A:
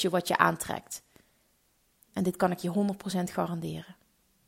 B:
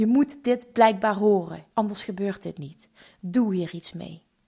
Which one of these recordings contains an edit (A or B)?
B